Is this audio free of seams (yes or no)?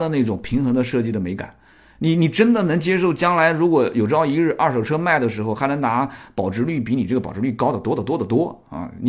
yes